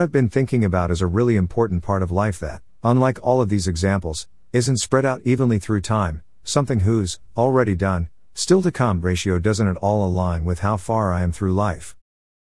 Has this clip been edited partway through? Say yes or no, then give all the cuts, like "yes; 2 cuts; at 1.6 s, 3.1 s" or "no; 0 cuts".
no; 0 cuts